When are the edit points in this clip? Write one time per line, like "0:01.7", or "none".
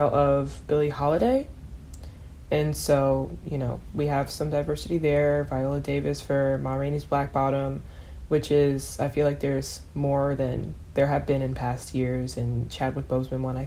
none